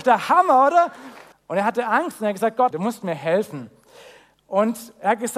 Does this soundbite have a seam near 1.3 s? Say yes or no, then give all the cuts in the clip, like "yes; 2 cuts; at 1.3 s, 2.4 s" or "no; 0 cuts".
yes; 2 cuts; at 1.3 s, 2.7 s